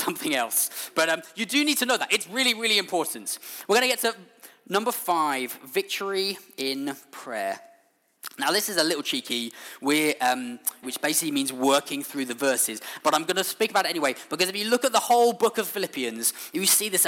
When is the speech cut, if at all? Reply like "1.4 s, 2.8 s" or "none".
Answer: 10.8 s, 13.0 s